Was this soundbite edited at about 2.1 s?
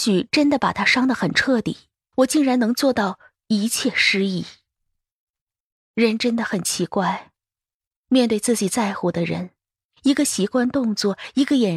yes; 1 cut; at 2.1 s

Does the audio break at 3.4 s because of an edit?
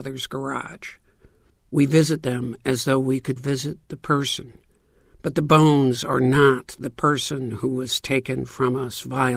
yes; 2 cuts; at 1.5 s, 3.4 s

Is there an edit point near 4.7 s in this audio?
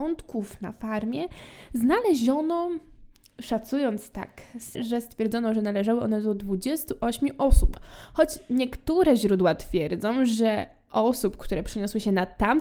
yes; 1 cut; at 4.7 s

